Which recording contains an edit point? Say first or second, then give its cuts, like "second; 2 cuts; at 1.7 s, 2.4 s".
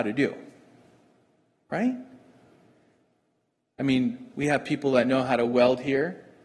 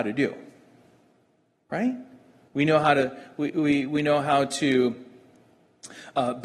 second; 1 cut; at 2.5 s